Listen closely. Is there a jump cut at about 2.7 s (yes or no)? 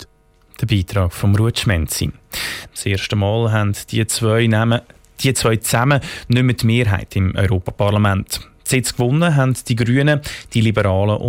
yes